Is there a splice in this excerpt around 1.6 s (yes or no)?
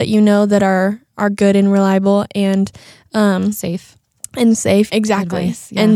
no